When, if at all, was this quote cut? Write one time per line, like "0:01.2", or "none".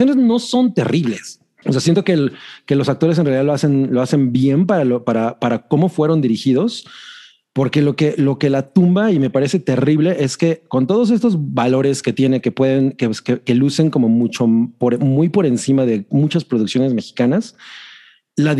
0:01.6